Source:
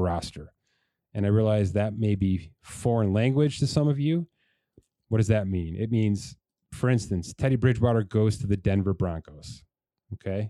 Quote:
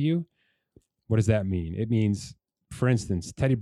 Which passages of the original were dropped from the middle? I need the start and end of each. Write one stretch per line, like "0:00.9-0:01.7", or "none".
none